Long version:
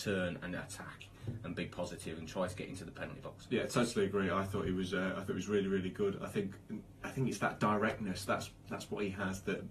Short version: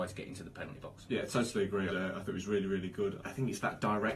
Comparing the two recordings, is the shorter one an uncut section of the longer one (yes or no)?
no